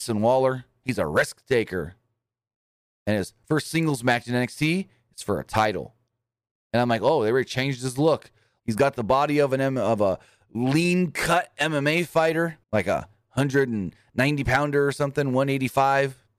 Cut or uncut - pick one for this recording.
cut